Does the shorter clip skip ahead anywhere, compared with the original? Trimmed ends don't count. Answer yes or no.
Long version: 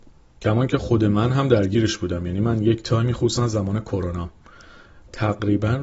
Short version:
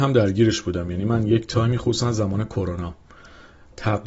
no